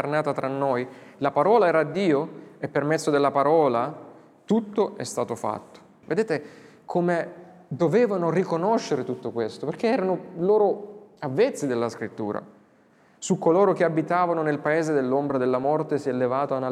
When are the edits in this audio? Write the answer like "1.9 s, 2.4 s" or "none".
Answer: 6.0 s